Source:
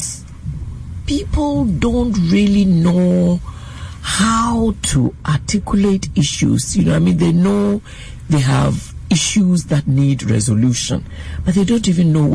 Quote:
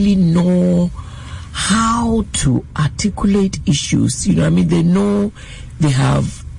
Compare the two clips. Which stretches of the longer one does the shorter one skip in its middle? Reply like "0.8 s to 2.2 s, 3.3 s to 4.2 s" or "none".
none